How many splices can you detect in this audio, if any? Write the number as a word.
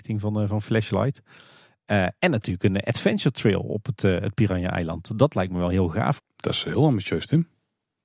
one